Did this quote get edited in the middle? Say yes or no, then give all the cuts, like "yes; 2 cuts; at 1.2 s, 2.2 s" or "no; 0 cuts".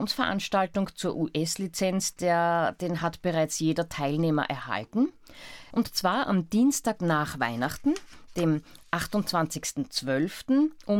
yes; 1 cut; at 5.7 s